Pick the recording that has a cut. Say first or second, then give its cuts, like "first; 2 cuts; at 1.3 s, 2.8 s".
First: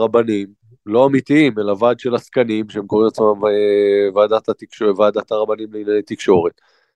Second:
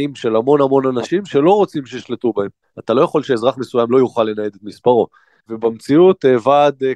second; 2 cuts; at 2.6 s, 5.4 s